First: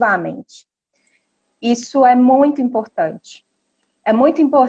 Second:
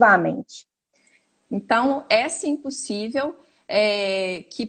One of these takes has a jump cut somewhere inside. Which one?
second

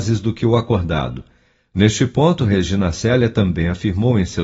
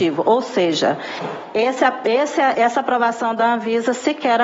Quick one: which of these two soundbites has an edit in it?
second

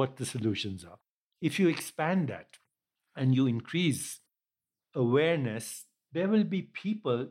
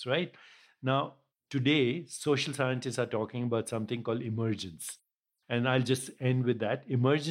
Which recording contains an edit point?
first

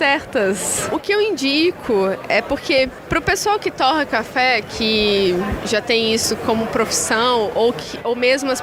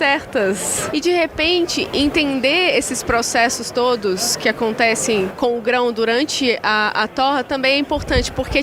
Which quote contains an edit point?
second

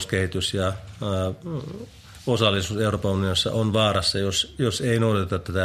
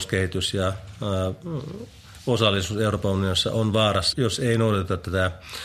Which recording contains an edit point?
second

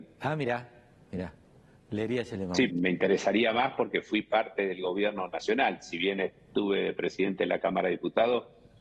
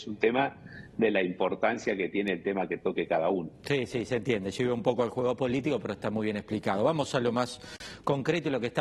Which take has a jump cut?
first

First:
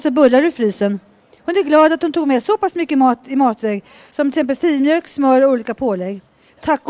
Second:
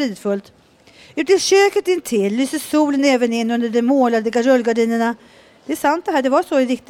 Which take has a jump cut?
first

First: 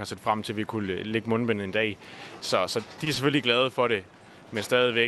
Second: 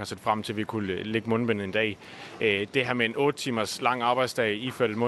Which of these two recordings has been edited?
first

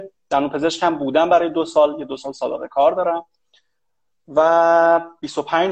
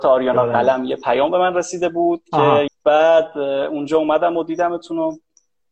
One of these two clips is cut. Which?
second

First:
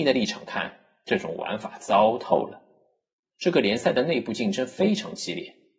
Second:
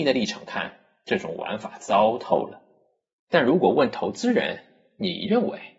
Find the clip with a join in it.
first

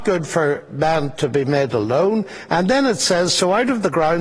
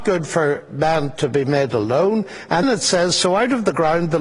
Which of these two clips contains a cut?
second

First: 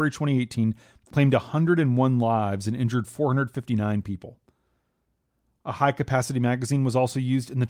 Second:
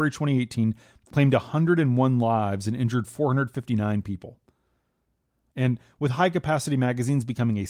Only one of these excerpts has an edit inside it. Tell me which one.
second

